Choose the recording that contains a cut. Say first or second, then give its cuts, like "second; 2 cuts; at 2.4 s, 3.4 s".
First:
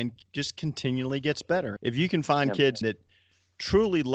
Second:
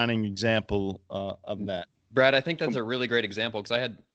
first; 2 cuts; at 1.8 s, 2.8 s